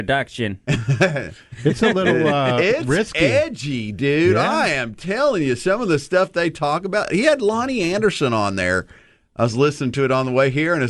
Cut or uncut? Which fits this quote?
uncut